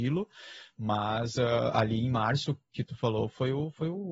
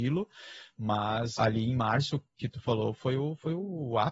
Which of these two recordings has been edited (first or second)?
second